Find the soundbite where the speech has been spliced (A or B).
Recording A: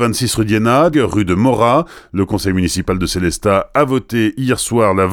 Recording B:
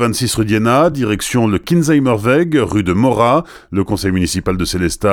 A